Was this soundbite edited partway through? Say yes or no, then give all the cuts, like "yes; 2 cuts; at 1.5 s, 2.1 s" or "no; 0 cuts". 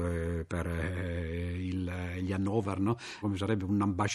yes; 1 cut; at 3.2 s